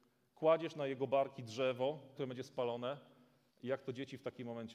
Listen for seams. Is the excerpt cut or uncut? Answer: cut